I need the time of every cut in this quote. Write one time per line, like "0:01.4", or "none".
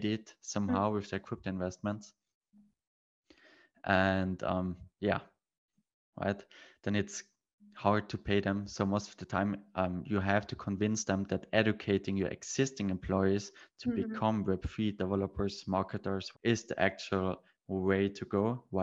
0:16.3